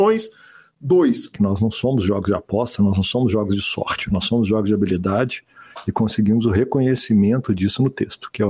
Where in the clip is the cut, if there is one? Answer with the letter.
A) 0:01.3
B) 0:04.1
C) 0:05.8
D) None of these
A